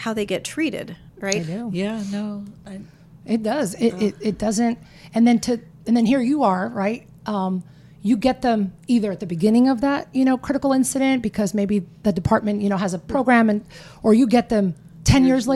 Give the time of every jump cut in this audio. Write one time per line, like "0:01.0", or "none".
none